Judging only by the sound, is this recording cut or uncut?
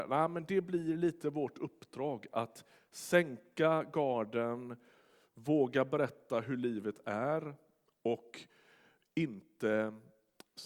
uncut